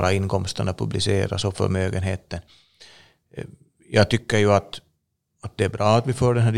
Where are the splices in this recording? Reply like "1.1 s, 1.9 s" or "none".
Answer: none